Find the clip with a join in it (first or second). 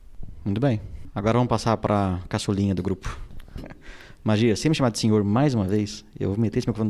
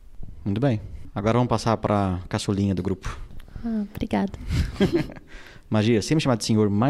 first